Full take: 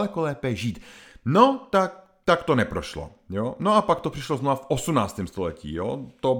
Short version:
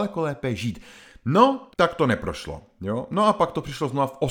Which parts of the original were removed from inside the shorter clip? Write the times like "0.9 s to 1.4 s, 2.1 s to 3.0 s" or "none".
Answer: 1.7 s to 2.2 s